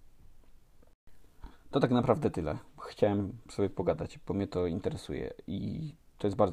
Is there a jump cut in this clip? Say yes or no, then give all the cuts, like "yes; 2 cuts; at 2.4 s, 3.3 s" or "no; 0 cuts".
no; 0 cuts